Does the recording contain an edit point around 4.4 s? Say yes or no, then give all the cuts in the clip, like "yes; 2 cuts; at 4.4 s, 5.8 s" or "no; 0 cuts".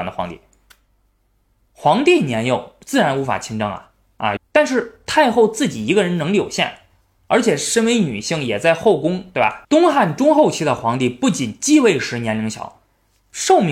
yes; 2 cuts; at 4.4 s, 9.6 s